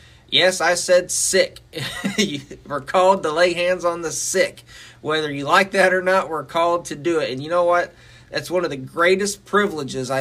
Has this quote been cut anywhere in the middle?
no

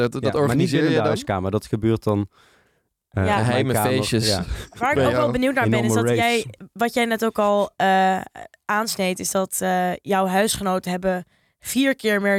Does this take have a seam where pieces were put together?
no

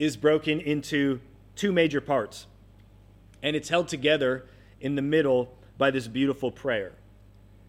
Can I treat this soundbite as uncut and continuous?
yes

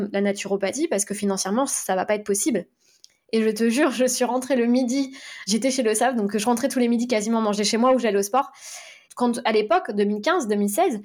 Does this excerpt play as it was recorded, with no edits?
no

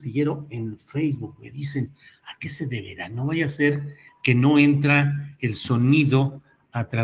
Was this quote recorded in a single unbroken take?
yes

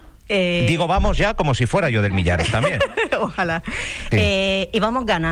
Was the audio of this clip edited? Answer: yes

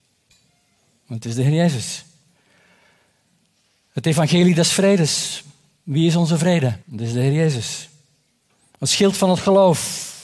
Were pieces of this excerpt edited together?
yes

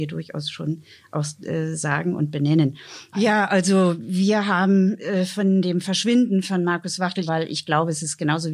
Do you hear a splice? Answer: yes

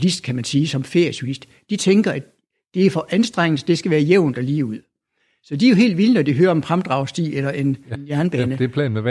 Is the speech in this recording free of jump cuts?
no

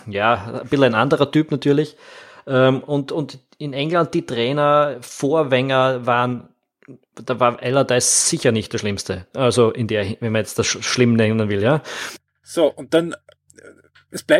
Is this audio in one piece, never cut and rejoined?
yes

